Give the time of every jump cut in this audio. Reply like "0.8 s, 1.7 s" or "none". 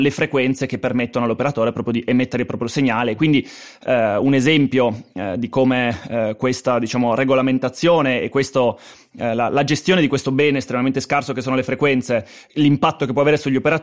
none